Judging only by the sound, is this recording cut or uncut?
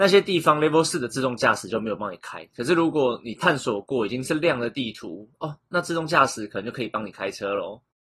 uncut